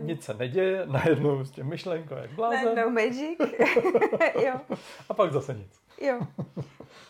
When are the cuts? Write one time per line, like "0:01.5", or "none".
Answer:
none